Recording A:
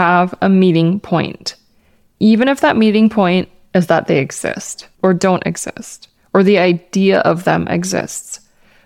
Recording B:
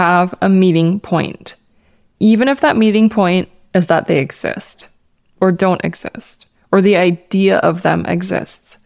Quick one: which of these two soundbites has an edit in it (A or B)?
A